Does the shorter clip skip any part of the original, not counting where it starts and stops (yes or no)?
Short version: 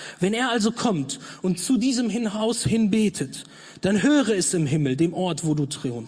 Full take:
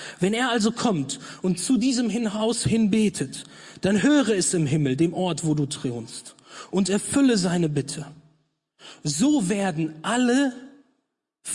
no